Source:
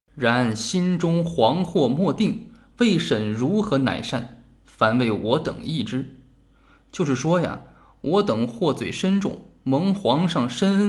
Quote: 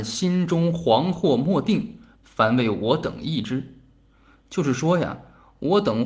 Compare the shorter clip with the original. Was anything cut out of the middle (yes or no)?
yes